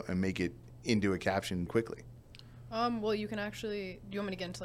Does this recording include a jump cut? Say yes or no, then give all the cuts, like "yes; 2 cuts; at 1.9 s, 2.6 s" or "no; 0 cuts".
yes; 1 cut; at 1.7 s